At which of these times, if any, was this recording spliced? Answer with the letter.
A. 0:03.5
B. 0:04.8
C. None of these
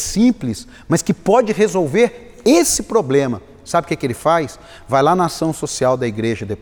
C